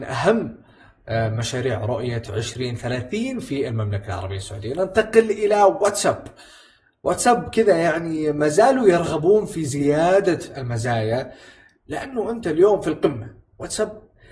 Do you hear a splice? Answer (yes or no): no